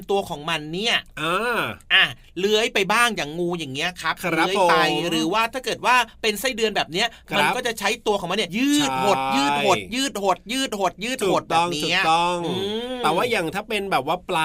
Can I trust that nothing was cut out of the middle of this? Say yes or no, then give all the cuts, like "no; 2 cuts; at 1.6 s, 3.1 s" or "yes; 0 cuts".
no; 1 cut; at 8.5 s